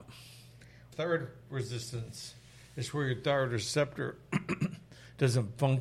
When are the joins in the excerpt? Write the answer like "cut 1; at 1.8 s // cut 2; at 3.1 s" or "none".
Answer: cut 1; at 0.9 s